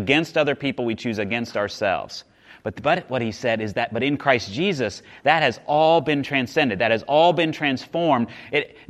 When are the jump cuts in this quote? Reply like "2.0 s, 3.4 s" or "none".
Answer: none